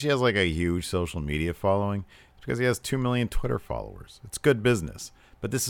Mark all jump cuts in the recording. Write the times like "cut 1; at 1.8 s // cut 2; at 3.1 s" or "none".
cut 1; at 2.3 s